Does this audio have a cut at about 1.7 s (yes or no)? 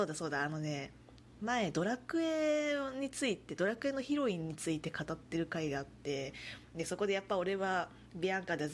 no